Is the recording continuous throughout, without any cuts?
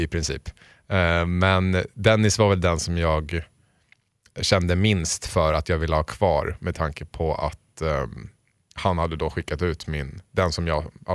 yes; 0 cuts

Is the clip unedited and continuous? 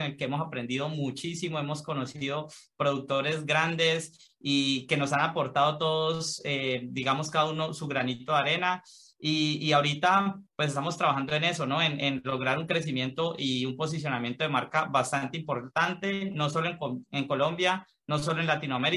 yes; 0 cuts

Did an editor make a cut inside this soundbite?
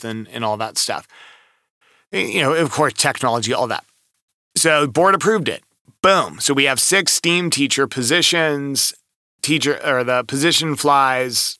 no; 0 cuts

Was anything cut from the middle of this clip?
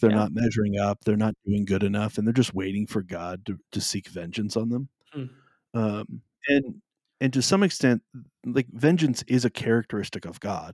no; 0 cuts

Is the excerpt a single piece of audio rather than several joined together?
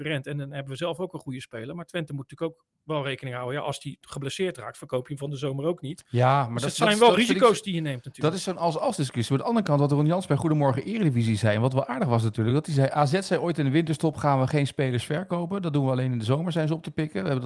yes; 0 cuts

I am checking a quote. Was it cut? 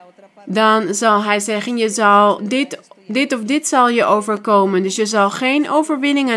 no; 0 cuts

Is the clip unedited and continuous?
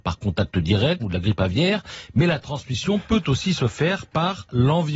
no; 1 cut; at 1.0 s

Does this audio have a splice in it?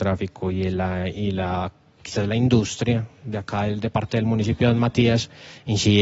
no; 0 cuts

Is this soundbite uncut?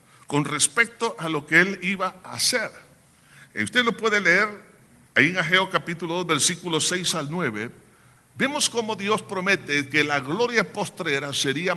yes; 0 cuts

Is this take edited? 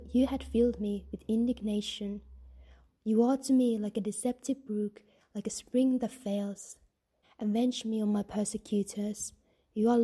yes; 2 cuts; at 2.9 s, 7.2 s

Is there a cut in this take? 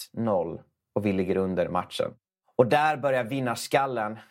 no; 0 cuts

